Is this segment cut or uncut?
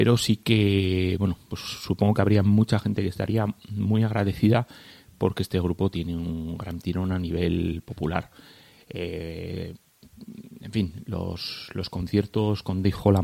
uncut